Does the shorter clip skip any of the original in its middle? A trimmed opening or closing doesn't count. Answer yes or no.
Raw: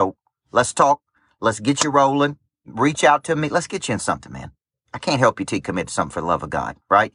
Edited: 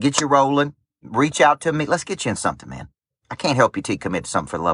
no